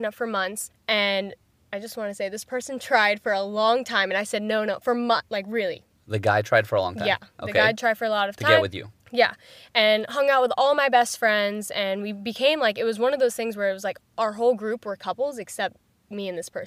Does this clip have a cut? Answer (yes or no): no